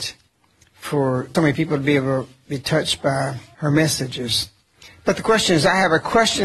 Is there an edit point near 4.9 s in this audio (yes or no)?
no